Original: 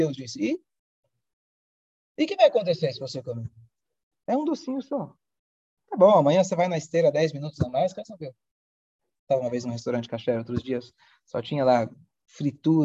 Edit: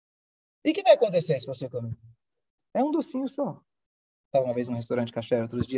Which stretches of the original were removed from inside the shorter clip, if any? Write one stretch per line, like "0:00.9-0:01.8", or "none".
0:05.8-0:09.2